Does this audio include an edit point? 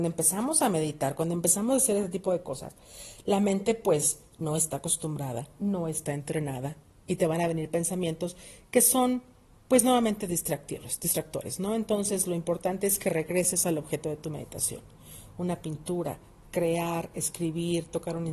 yes; 1 cut; at 16.4 s

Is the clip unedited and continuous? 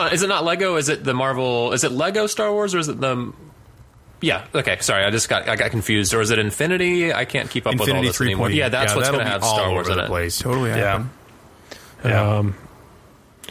no; 2 cuts; at 8.5 s, 10.4 s

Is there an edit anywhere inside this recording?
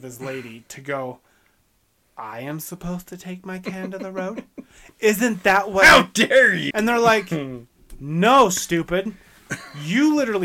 yes; 1 cut; at 6.7 s

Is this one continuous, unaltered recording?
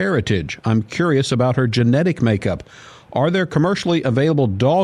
yes; 0 cuts

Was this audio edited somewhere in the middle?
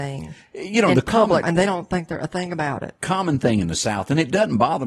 yes; 1 cut; at 1.4 s

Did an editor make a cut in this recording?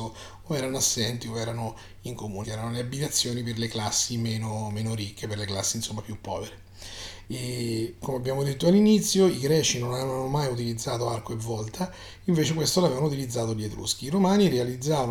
yes; 2 cuts; at 2.4 s, 7.2 s

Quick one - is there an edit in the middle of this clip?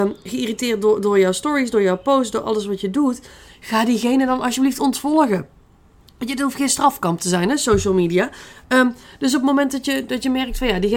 no; 0 cuts

